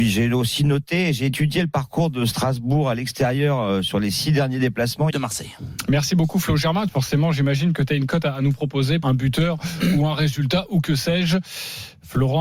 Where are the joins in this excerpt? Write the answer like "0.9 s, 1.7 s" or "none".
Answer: 5.1 s, 6.9 s, 9.0 s